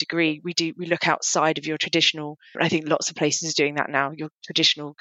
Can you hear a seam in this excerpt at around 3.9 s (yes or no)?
no